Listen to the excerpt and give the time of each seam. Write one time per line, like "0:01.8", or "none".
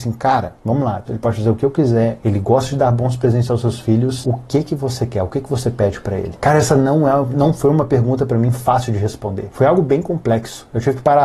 0:01.1
0:02.2